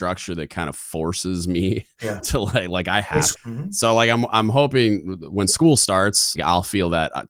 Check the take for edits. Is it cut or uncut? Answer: cut